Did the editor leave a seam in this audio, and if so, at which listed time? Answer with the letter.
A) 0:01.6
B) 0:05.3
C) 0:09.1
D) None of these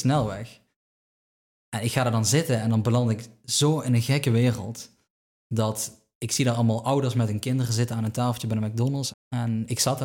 C